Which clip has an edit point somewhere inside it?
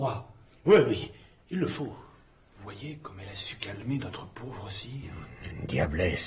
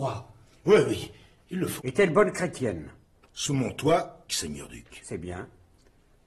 second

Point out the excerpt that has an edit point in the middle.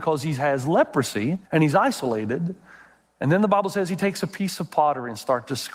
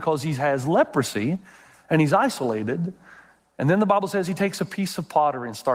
first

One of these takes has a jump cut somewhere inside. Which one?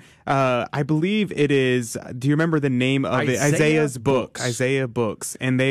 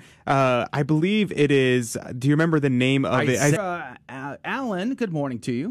second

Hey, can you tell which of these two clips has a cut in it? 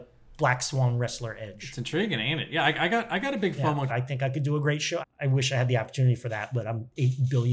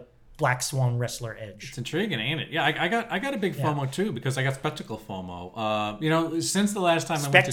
first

